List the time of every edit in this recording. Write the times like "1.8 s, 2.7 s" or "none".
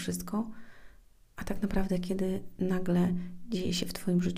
none